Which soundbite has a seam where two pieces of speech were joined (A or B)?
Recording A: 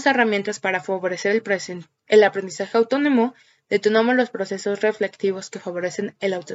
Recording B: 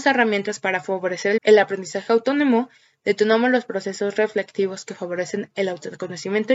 B